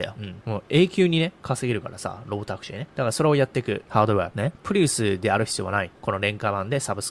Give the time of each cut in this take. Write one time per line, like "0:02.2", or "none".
0:03.8
0:05.9